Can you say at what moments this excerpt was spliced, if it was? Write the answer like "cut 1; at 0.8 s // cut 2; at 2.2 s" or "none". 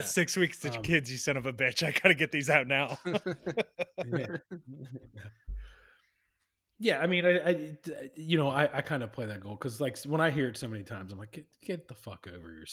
cut 1; at 6.8 s